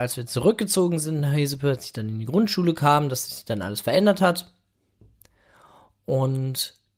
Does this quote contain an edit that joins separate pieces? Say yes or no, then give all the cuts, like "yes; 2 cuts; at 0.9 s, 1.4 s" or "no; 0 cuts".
no; 0 cuts